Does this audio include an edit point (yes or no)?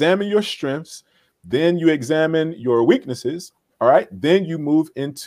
no